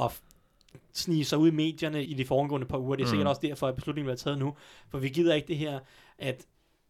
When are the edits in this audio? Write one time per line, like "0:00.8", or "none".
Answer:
0:02.1